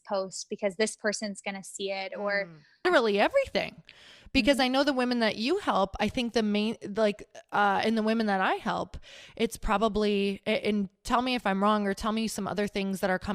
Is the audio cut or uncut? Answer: cut